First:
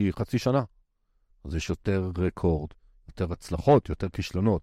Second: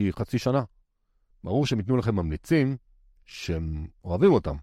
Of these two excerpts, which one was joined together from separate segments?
second; 1 cut; at 1.3 s

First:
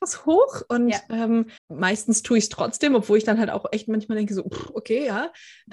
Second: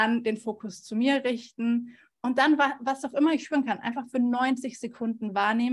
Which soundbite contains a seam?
first; 1 cut; at 1.6 s

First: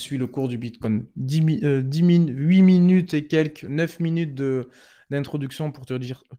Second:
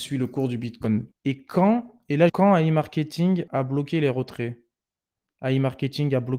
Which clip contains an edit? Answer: second; 3 cuts; at 1.1 s, 2.3 s, 3.5 s

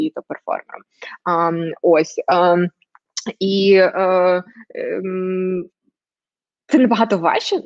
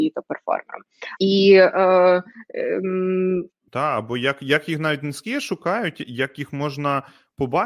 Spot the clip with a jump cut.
second; 2 cuts; at 1.2 s, 3.7 s

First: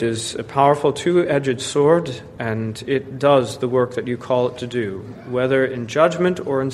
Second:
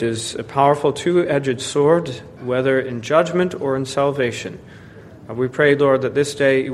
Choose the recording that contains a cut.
second; 1 cut; at 2.4 s

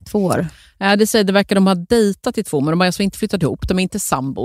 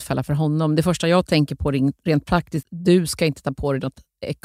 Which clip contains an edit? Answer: second; 1 cut; at 2.6 s

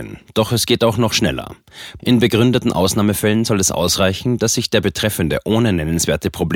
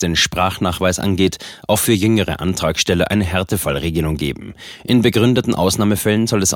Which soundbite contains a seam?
first; 1 cut; at 2.0 s

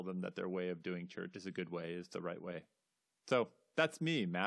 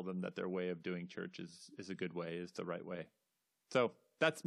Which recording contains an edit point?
first; 1 cut; at 1.3 s

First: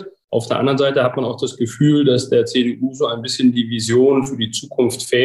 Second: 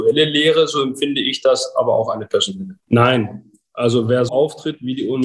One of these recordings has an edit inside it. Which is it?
second; 2 cuts; at 2.8 s, 4.3 s

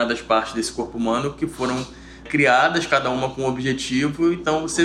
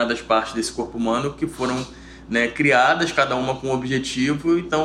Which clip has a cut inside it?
first; 1 cut; at 2.3 s

